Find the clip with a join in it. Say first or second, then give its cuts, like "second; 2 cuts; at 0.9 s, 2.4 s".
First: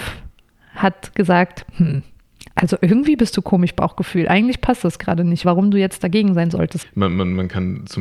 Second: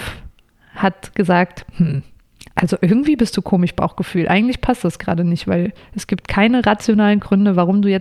first; 2 cuts; at 5.4 s, 6.8 s